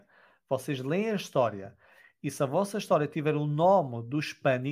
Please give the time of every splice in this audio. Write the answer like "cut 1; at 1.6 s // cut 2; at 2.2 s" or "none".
none